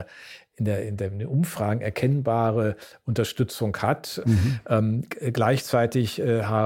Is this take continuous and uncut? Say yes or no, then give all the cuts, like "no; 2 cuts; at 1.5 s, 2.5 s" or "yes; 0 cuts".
no; 1 cut; at 4.2 s